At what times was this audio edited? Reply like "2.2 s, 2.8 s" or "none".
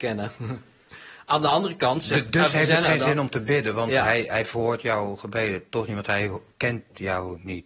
none